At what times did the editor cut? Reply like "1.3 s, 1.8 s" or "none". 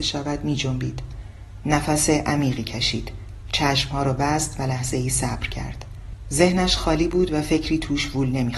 1.6 s